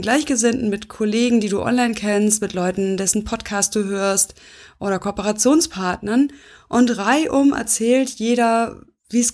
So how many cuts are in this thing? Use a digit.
0